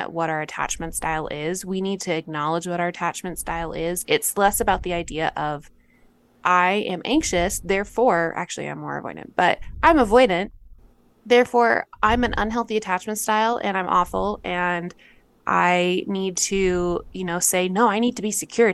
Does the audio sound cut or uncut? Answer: cut